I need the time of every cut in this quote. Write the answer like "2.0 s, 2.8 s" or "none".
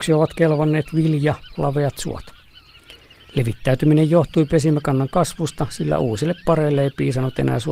1.5 s